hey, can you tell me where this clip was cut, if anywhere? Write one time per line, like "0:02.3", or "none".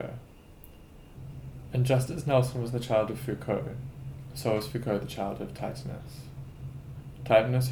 none